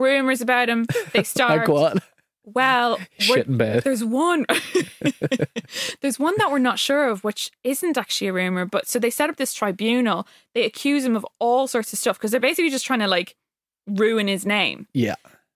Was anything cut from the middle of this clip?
no; 0 cuts

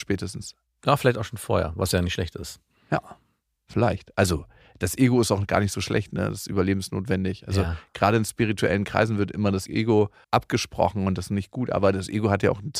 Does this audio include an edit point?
yes; 1 cut; at 10.2 s

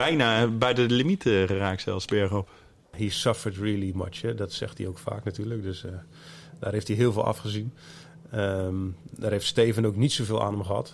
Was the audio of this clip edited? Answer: yes; 1 cut; at 2.8 s

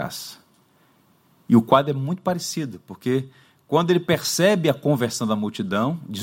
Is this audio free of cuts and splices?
yes; 0 cuts

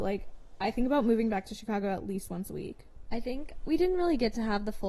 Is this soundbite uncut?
yes; 0 cuts

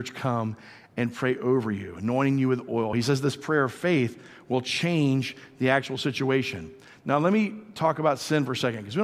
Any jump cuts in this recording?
no; 0 cuts

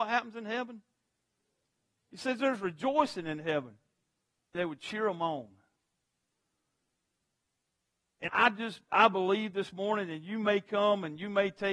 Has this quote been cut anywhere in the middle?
yes; 2 cuts; at 4.5 s, 8.3 s

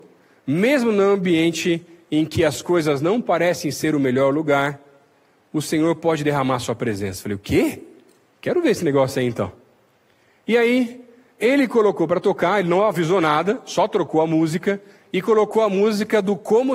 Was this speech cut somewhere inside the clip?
no; 0 cuts

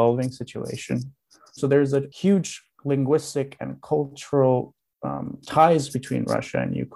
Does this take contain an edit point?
yes; 1 cut; at 1.6 s

